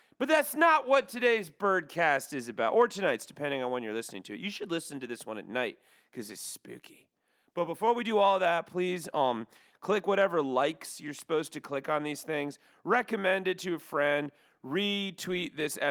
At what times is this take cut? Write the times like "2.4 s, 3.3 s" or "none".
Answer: none